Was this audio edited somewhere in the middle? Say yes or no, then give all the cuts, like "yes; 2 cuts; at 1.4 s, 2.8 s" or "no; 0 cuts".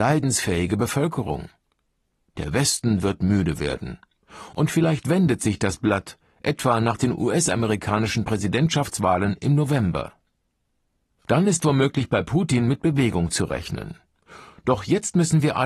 no; 0 cuts